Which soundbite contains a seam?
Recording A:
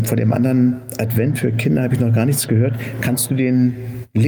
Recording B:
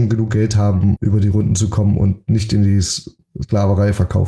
B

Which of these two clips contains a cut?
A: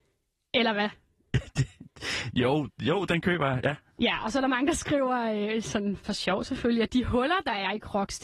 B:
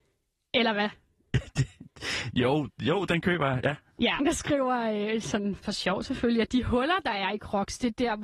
B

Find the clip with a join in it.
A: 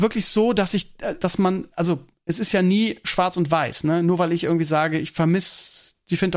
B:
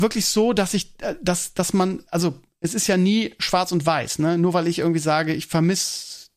A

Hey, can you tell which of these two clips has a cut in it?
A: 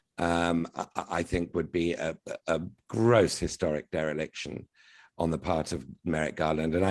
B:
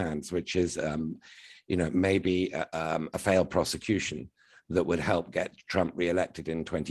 B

